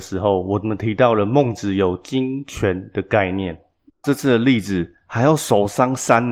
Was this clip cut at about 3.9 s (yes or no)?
yes